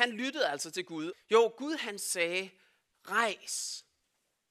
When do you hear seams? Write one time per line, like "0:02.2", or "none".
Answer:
0:01.1